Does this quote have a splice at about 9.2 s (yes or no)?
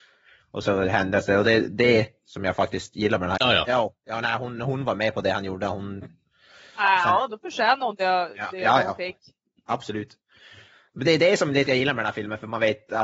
no